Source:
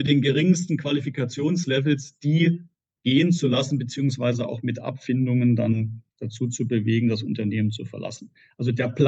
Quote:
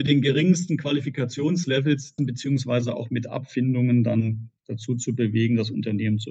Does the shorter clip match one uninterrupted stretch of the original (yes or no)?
no